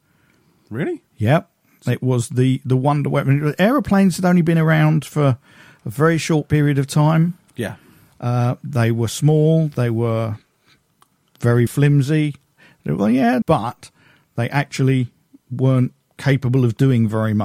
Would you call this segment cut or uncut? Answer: cut